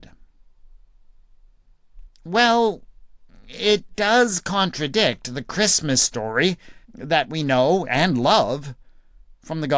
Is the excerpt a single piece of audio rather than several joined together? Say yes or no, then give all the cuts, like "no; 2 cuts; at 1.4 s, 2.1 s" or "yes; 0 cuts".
no; 2 cuts; at 2.1 s, 6.8 s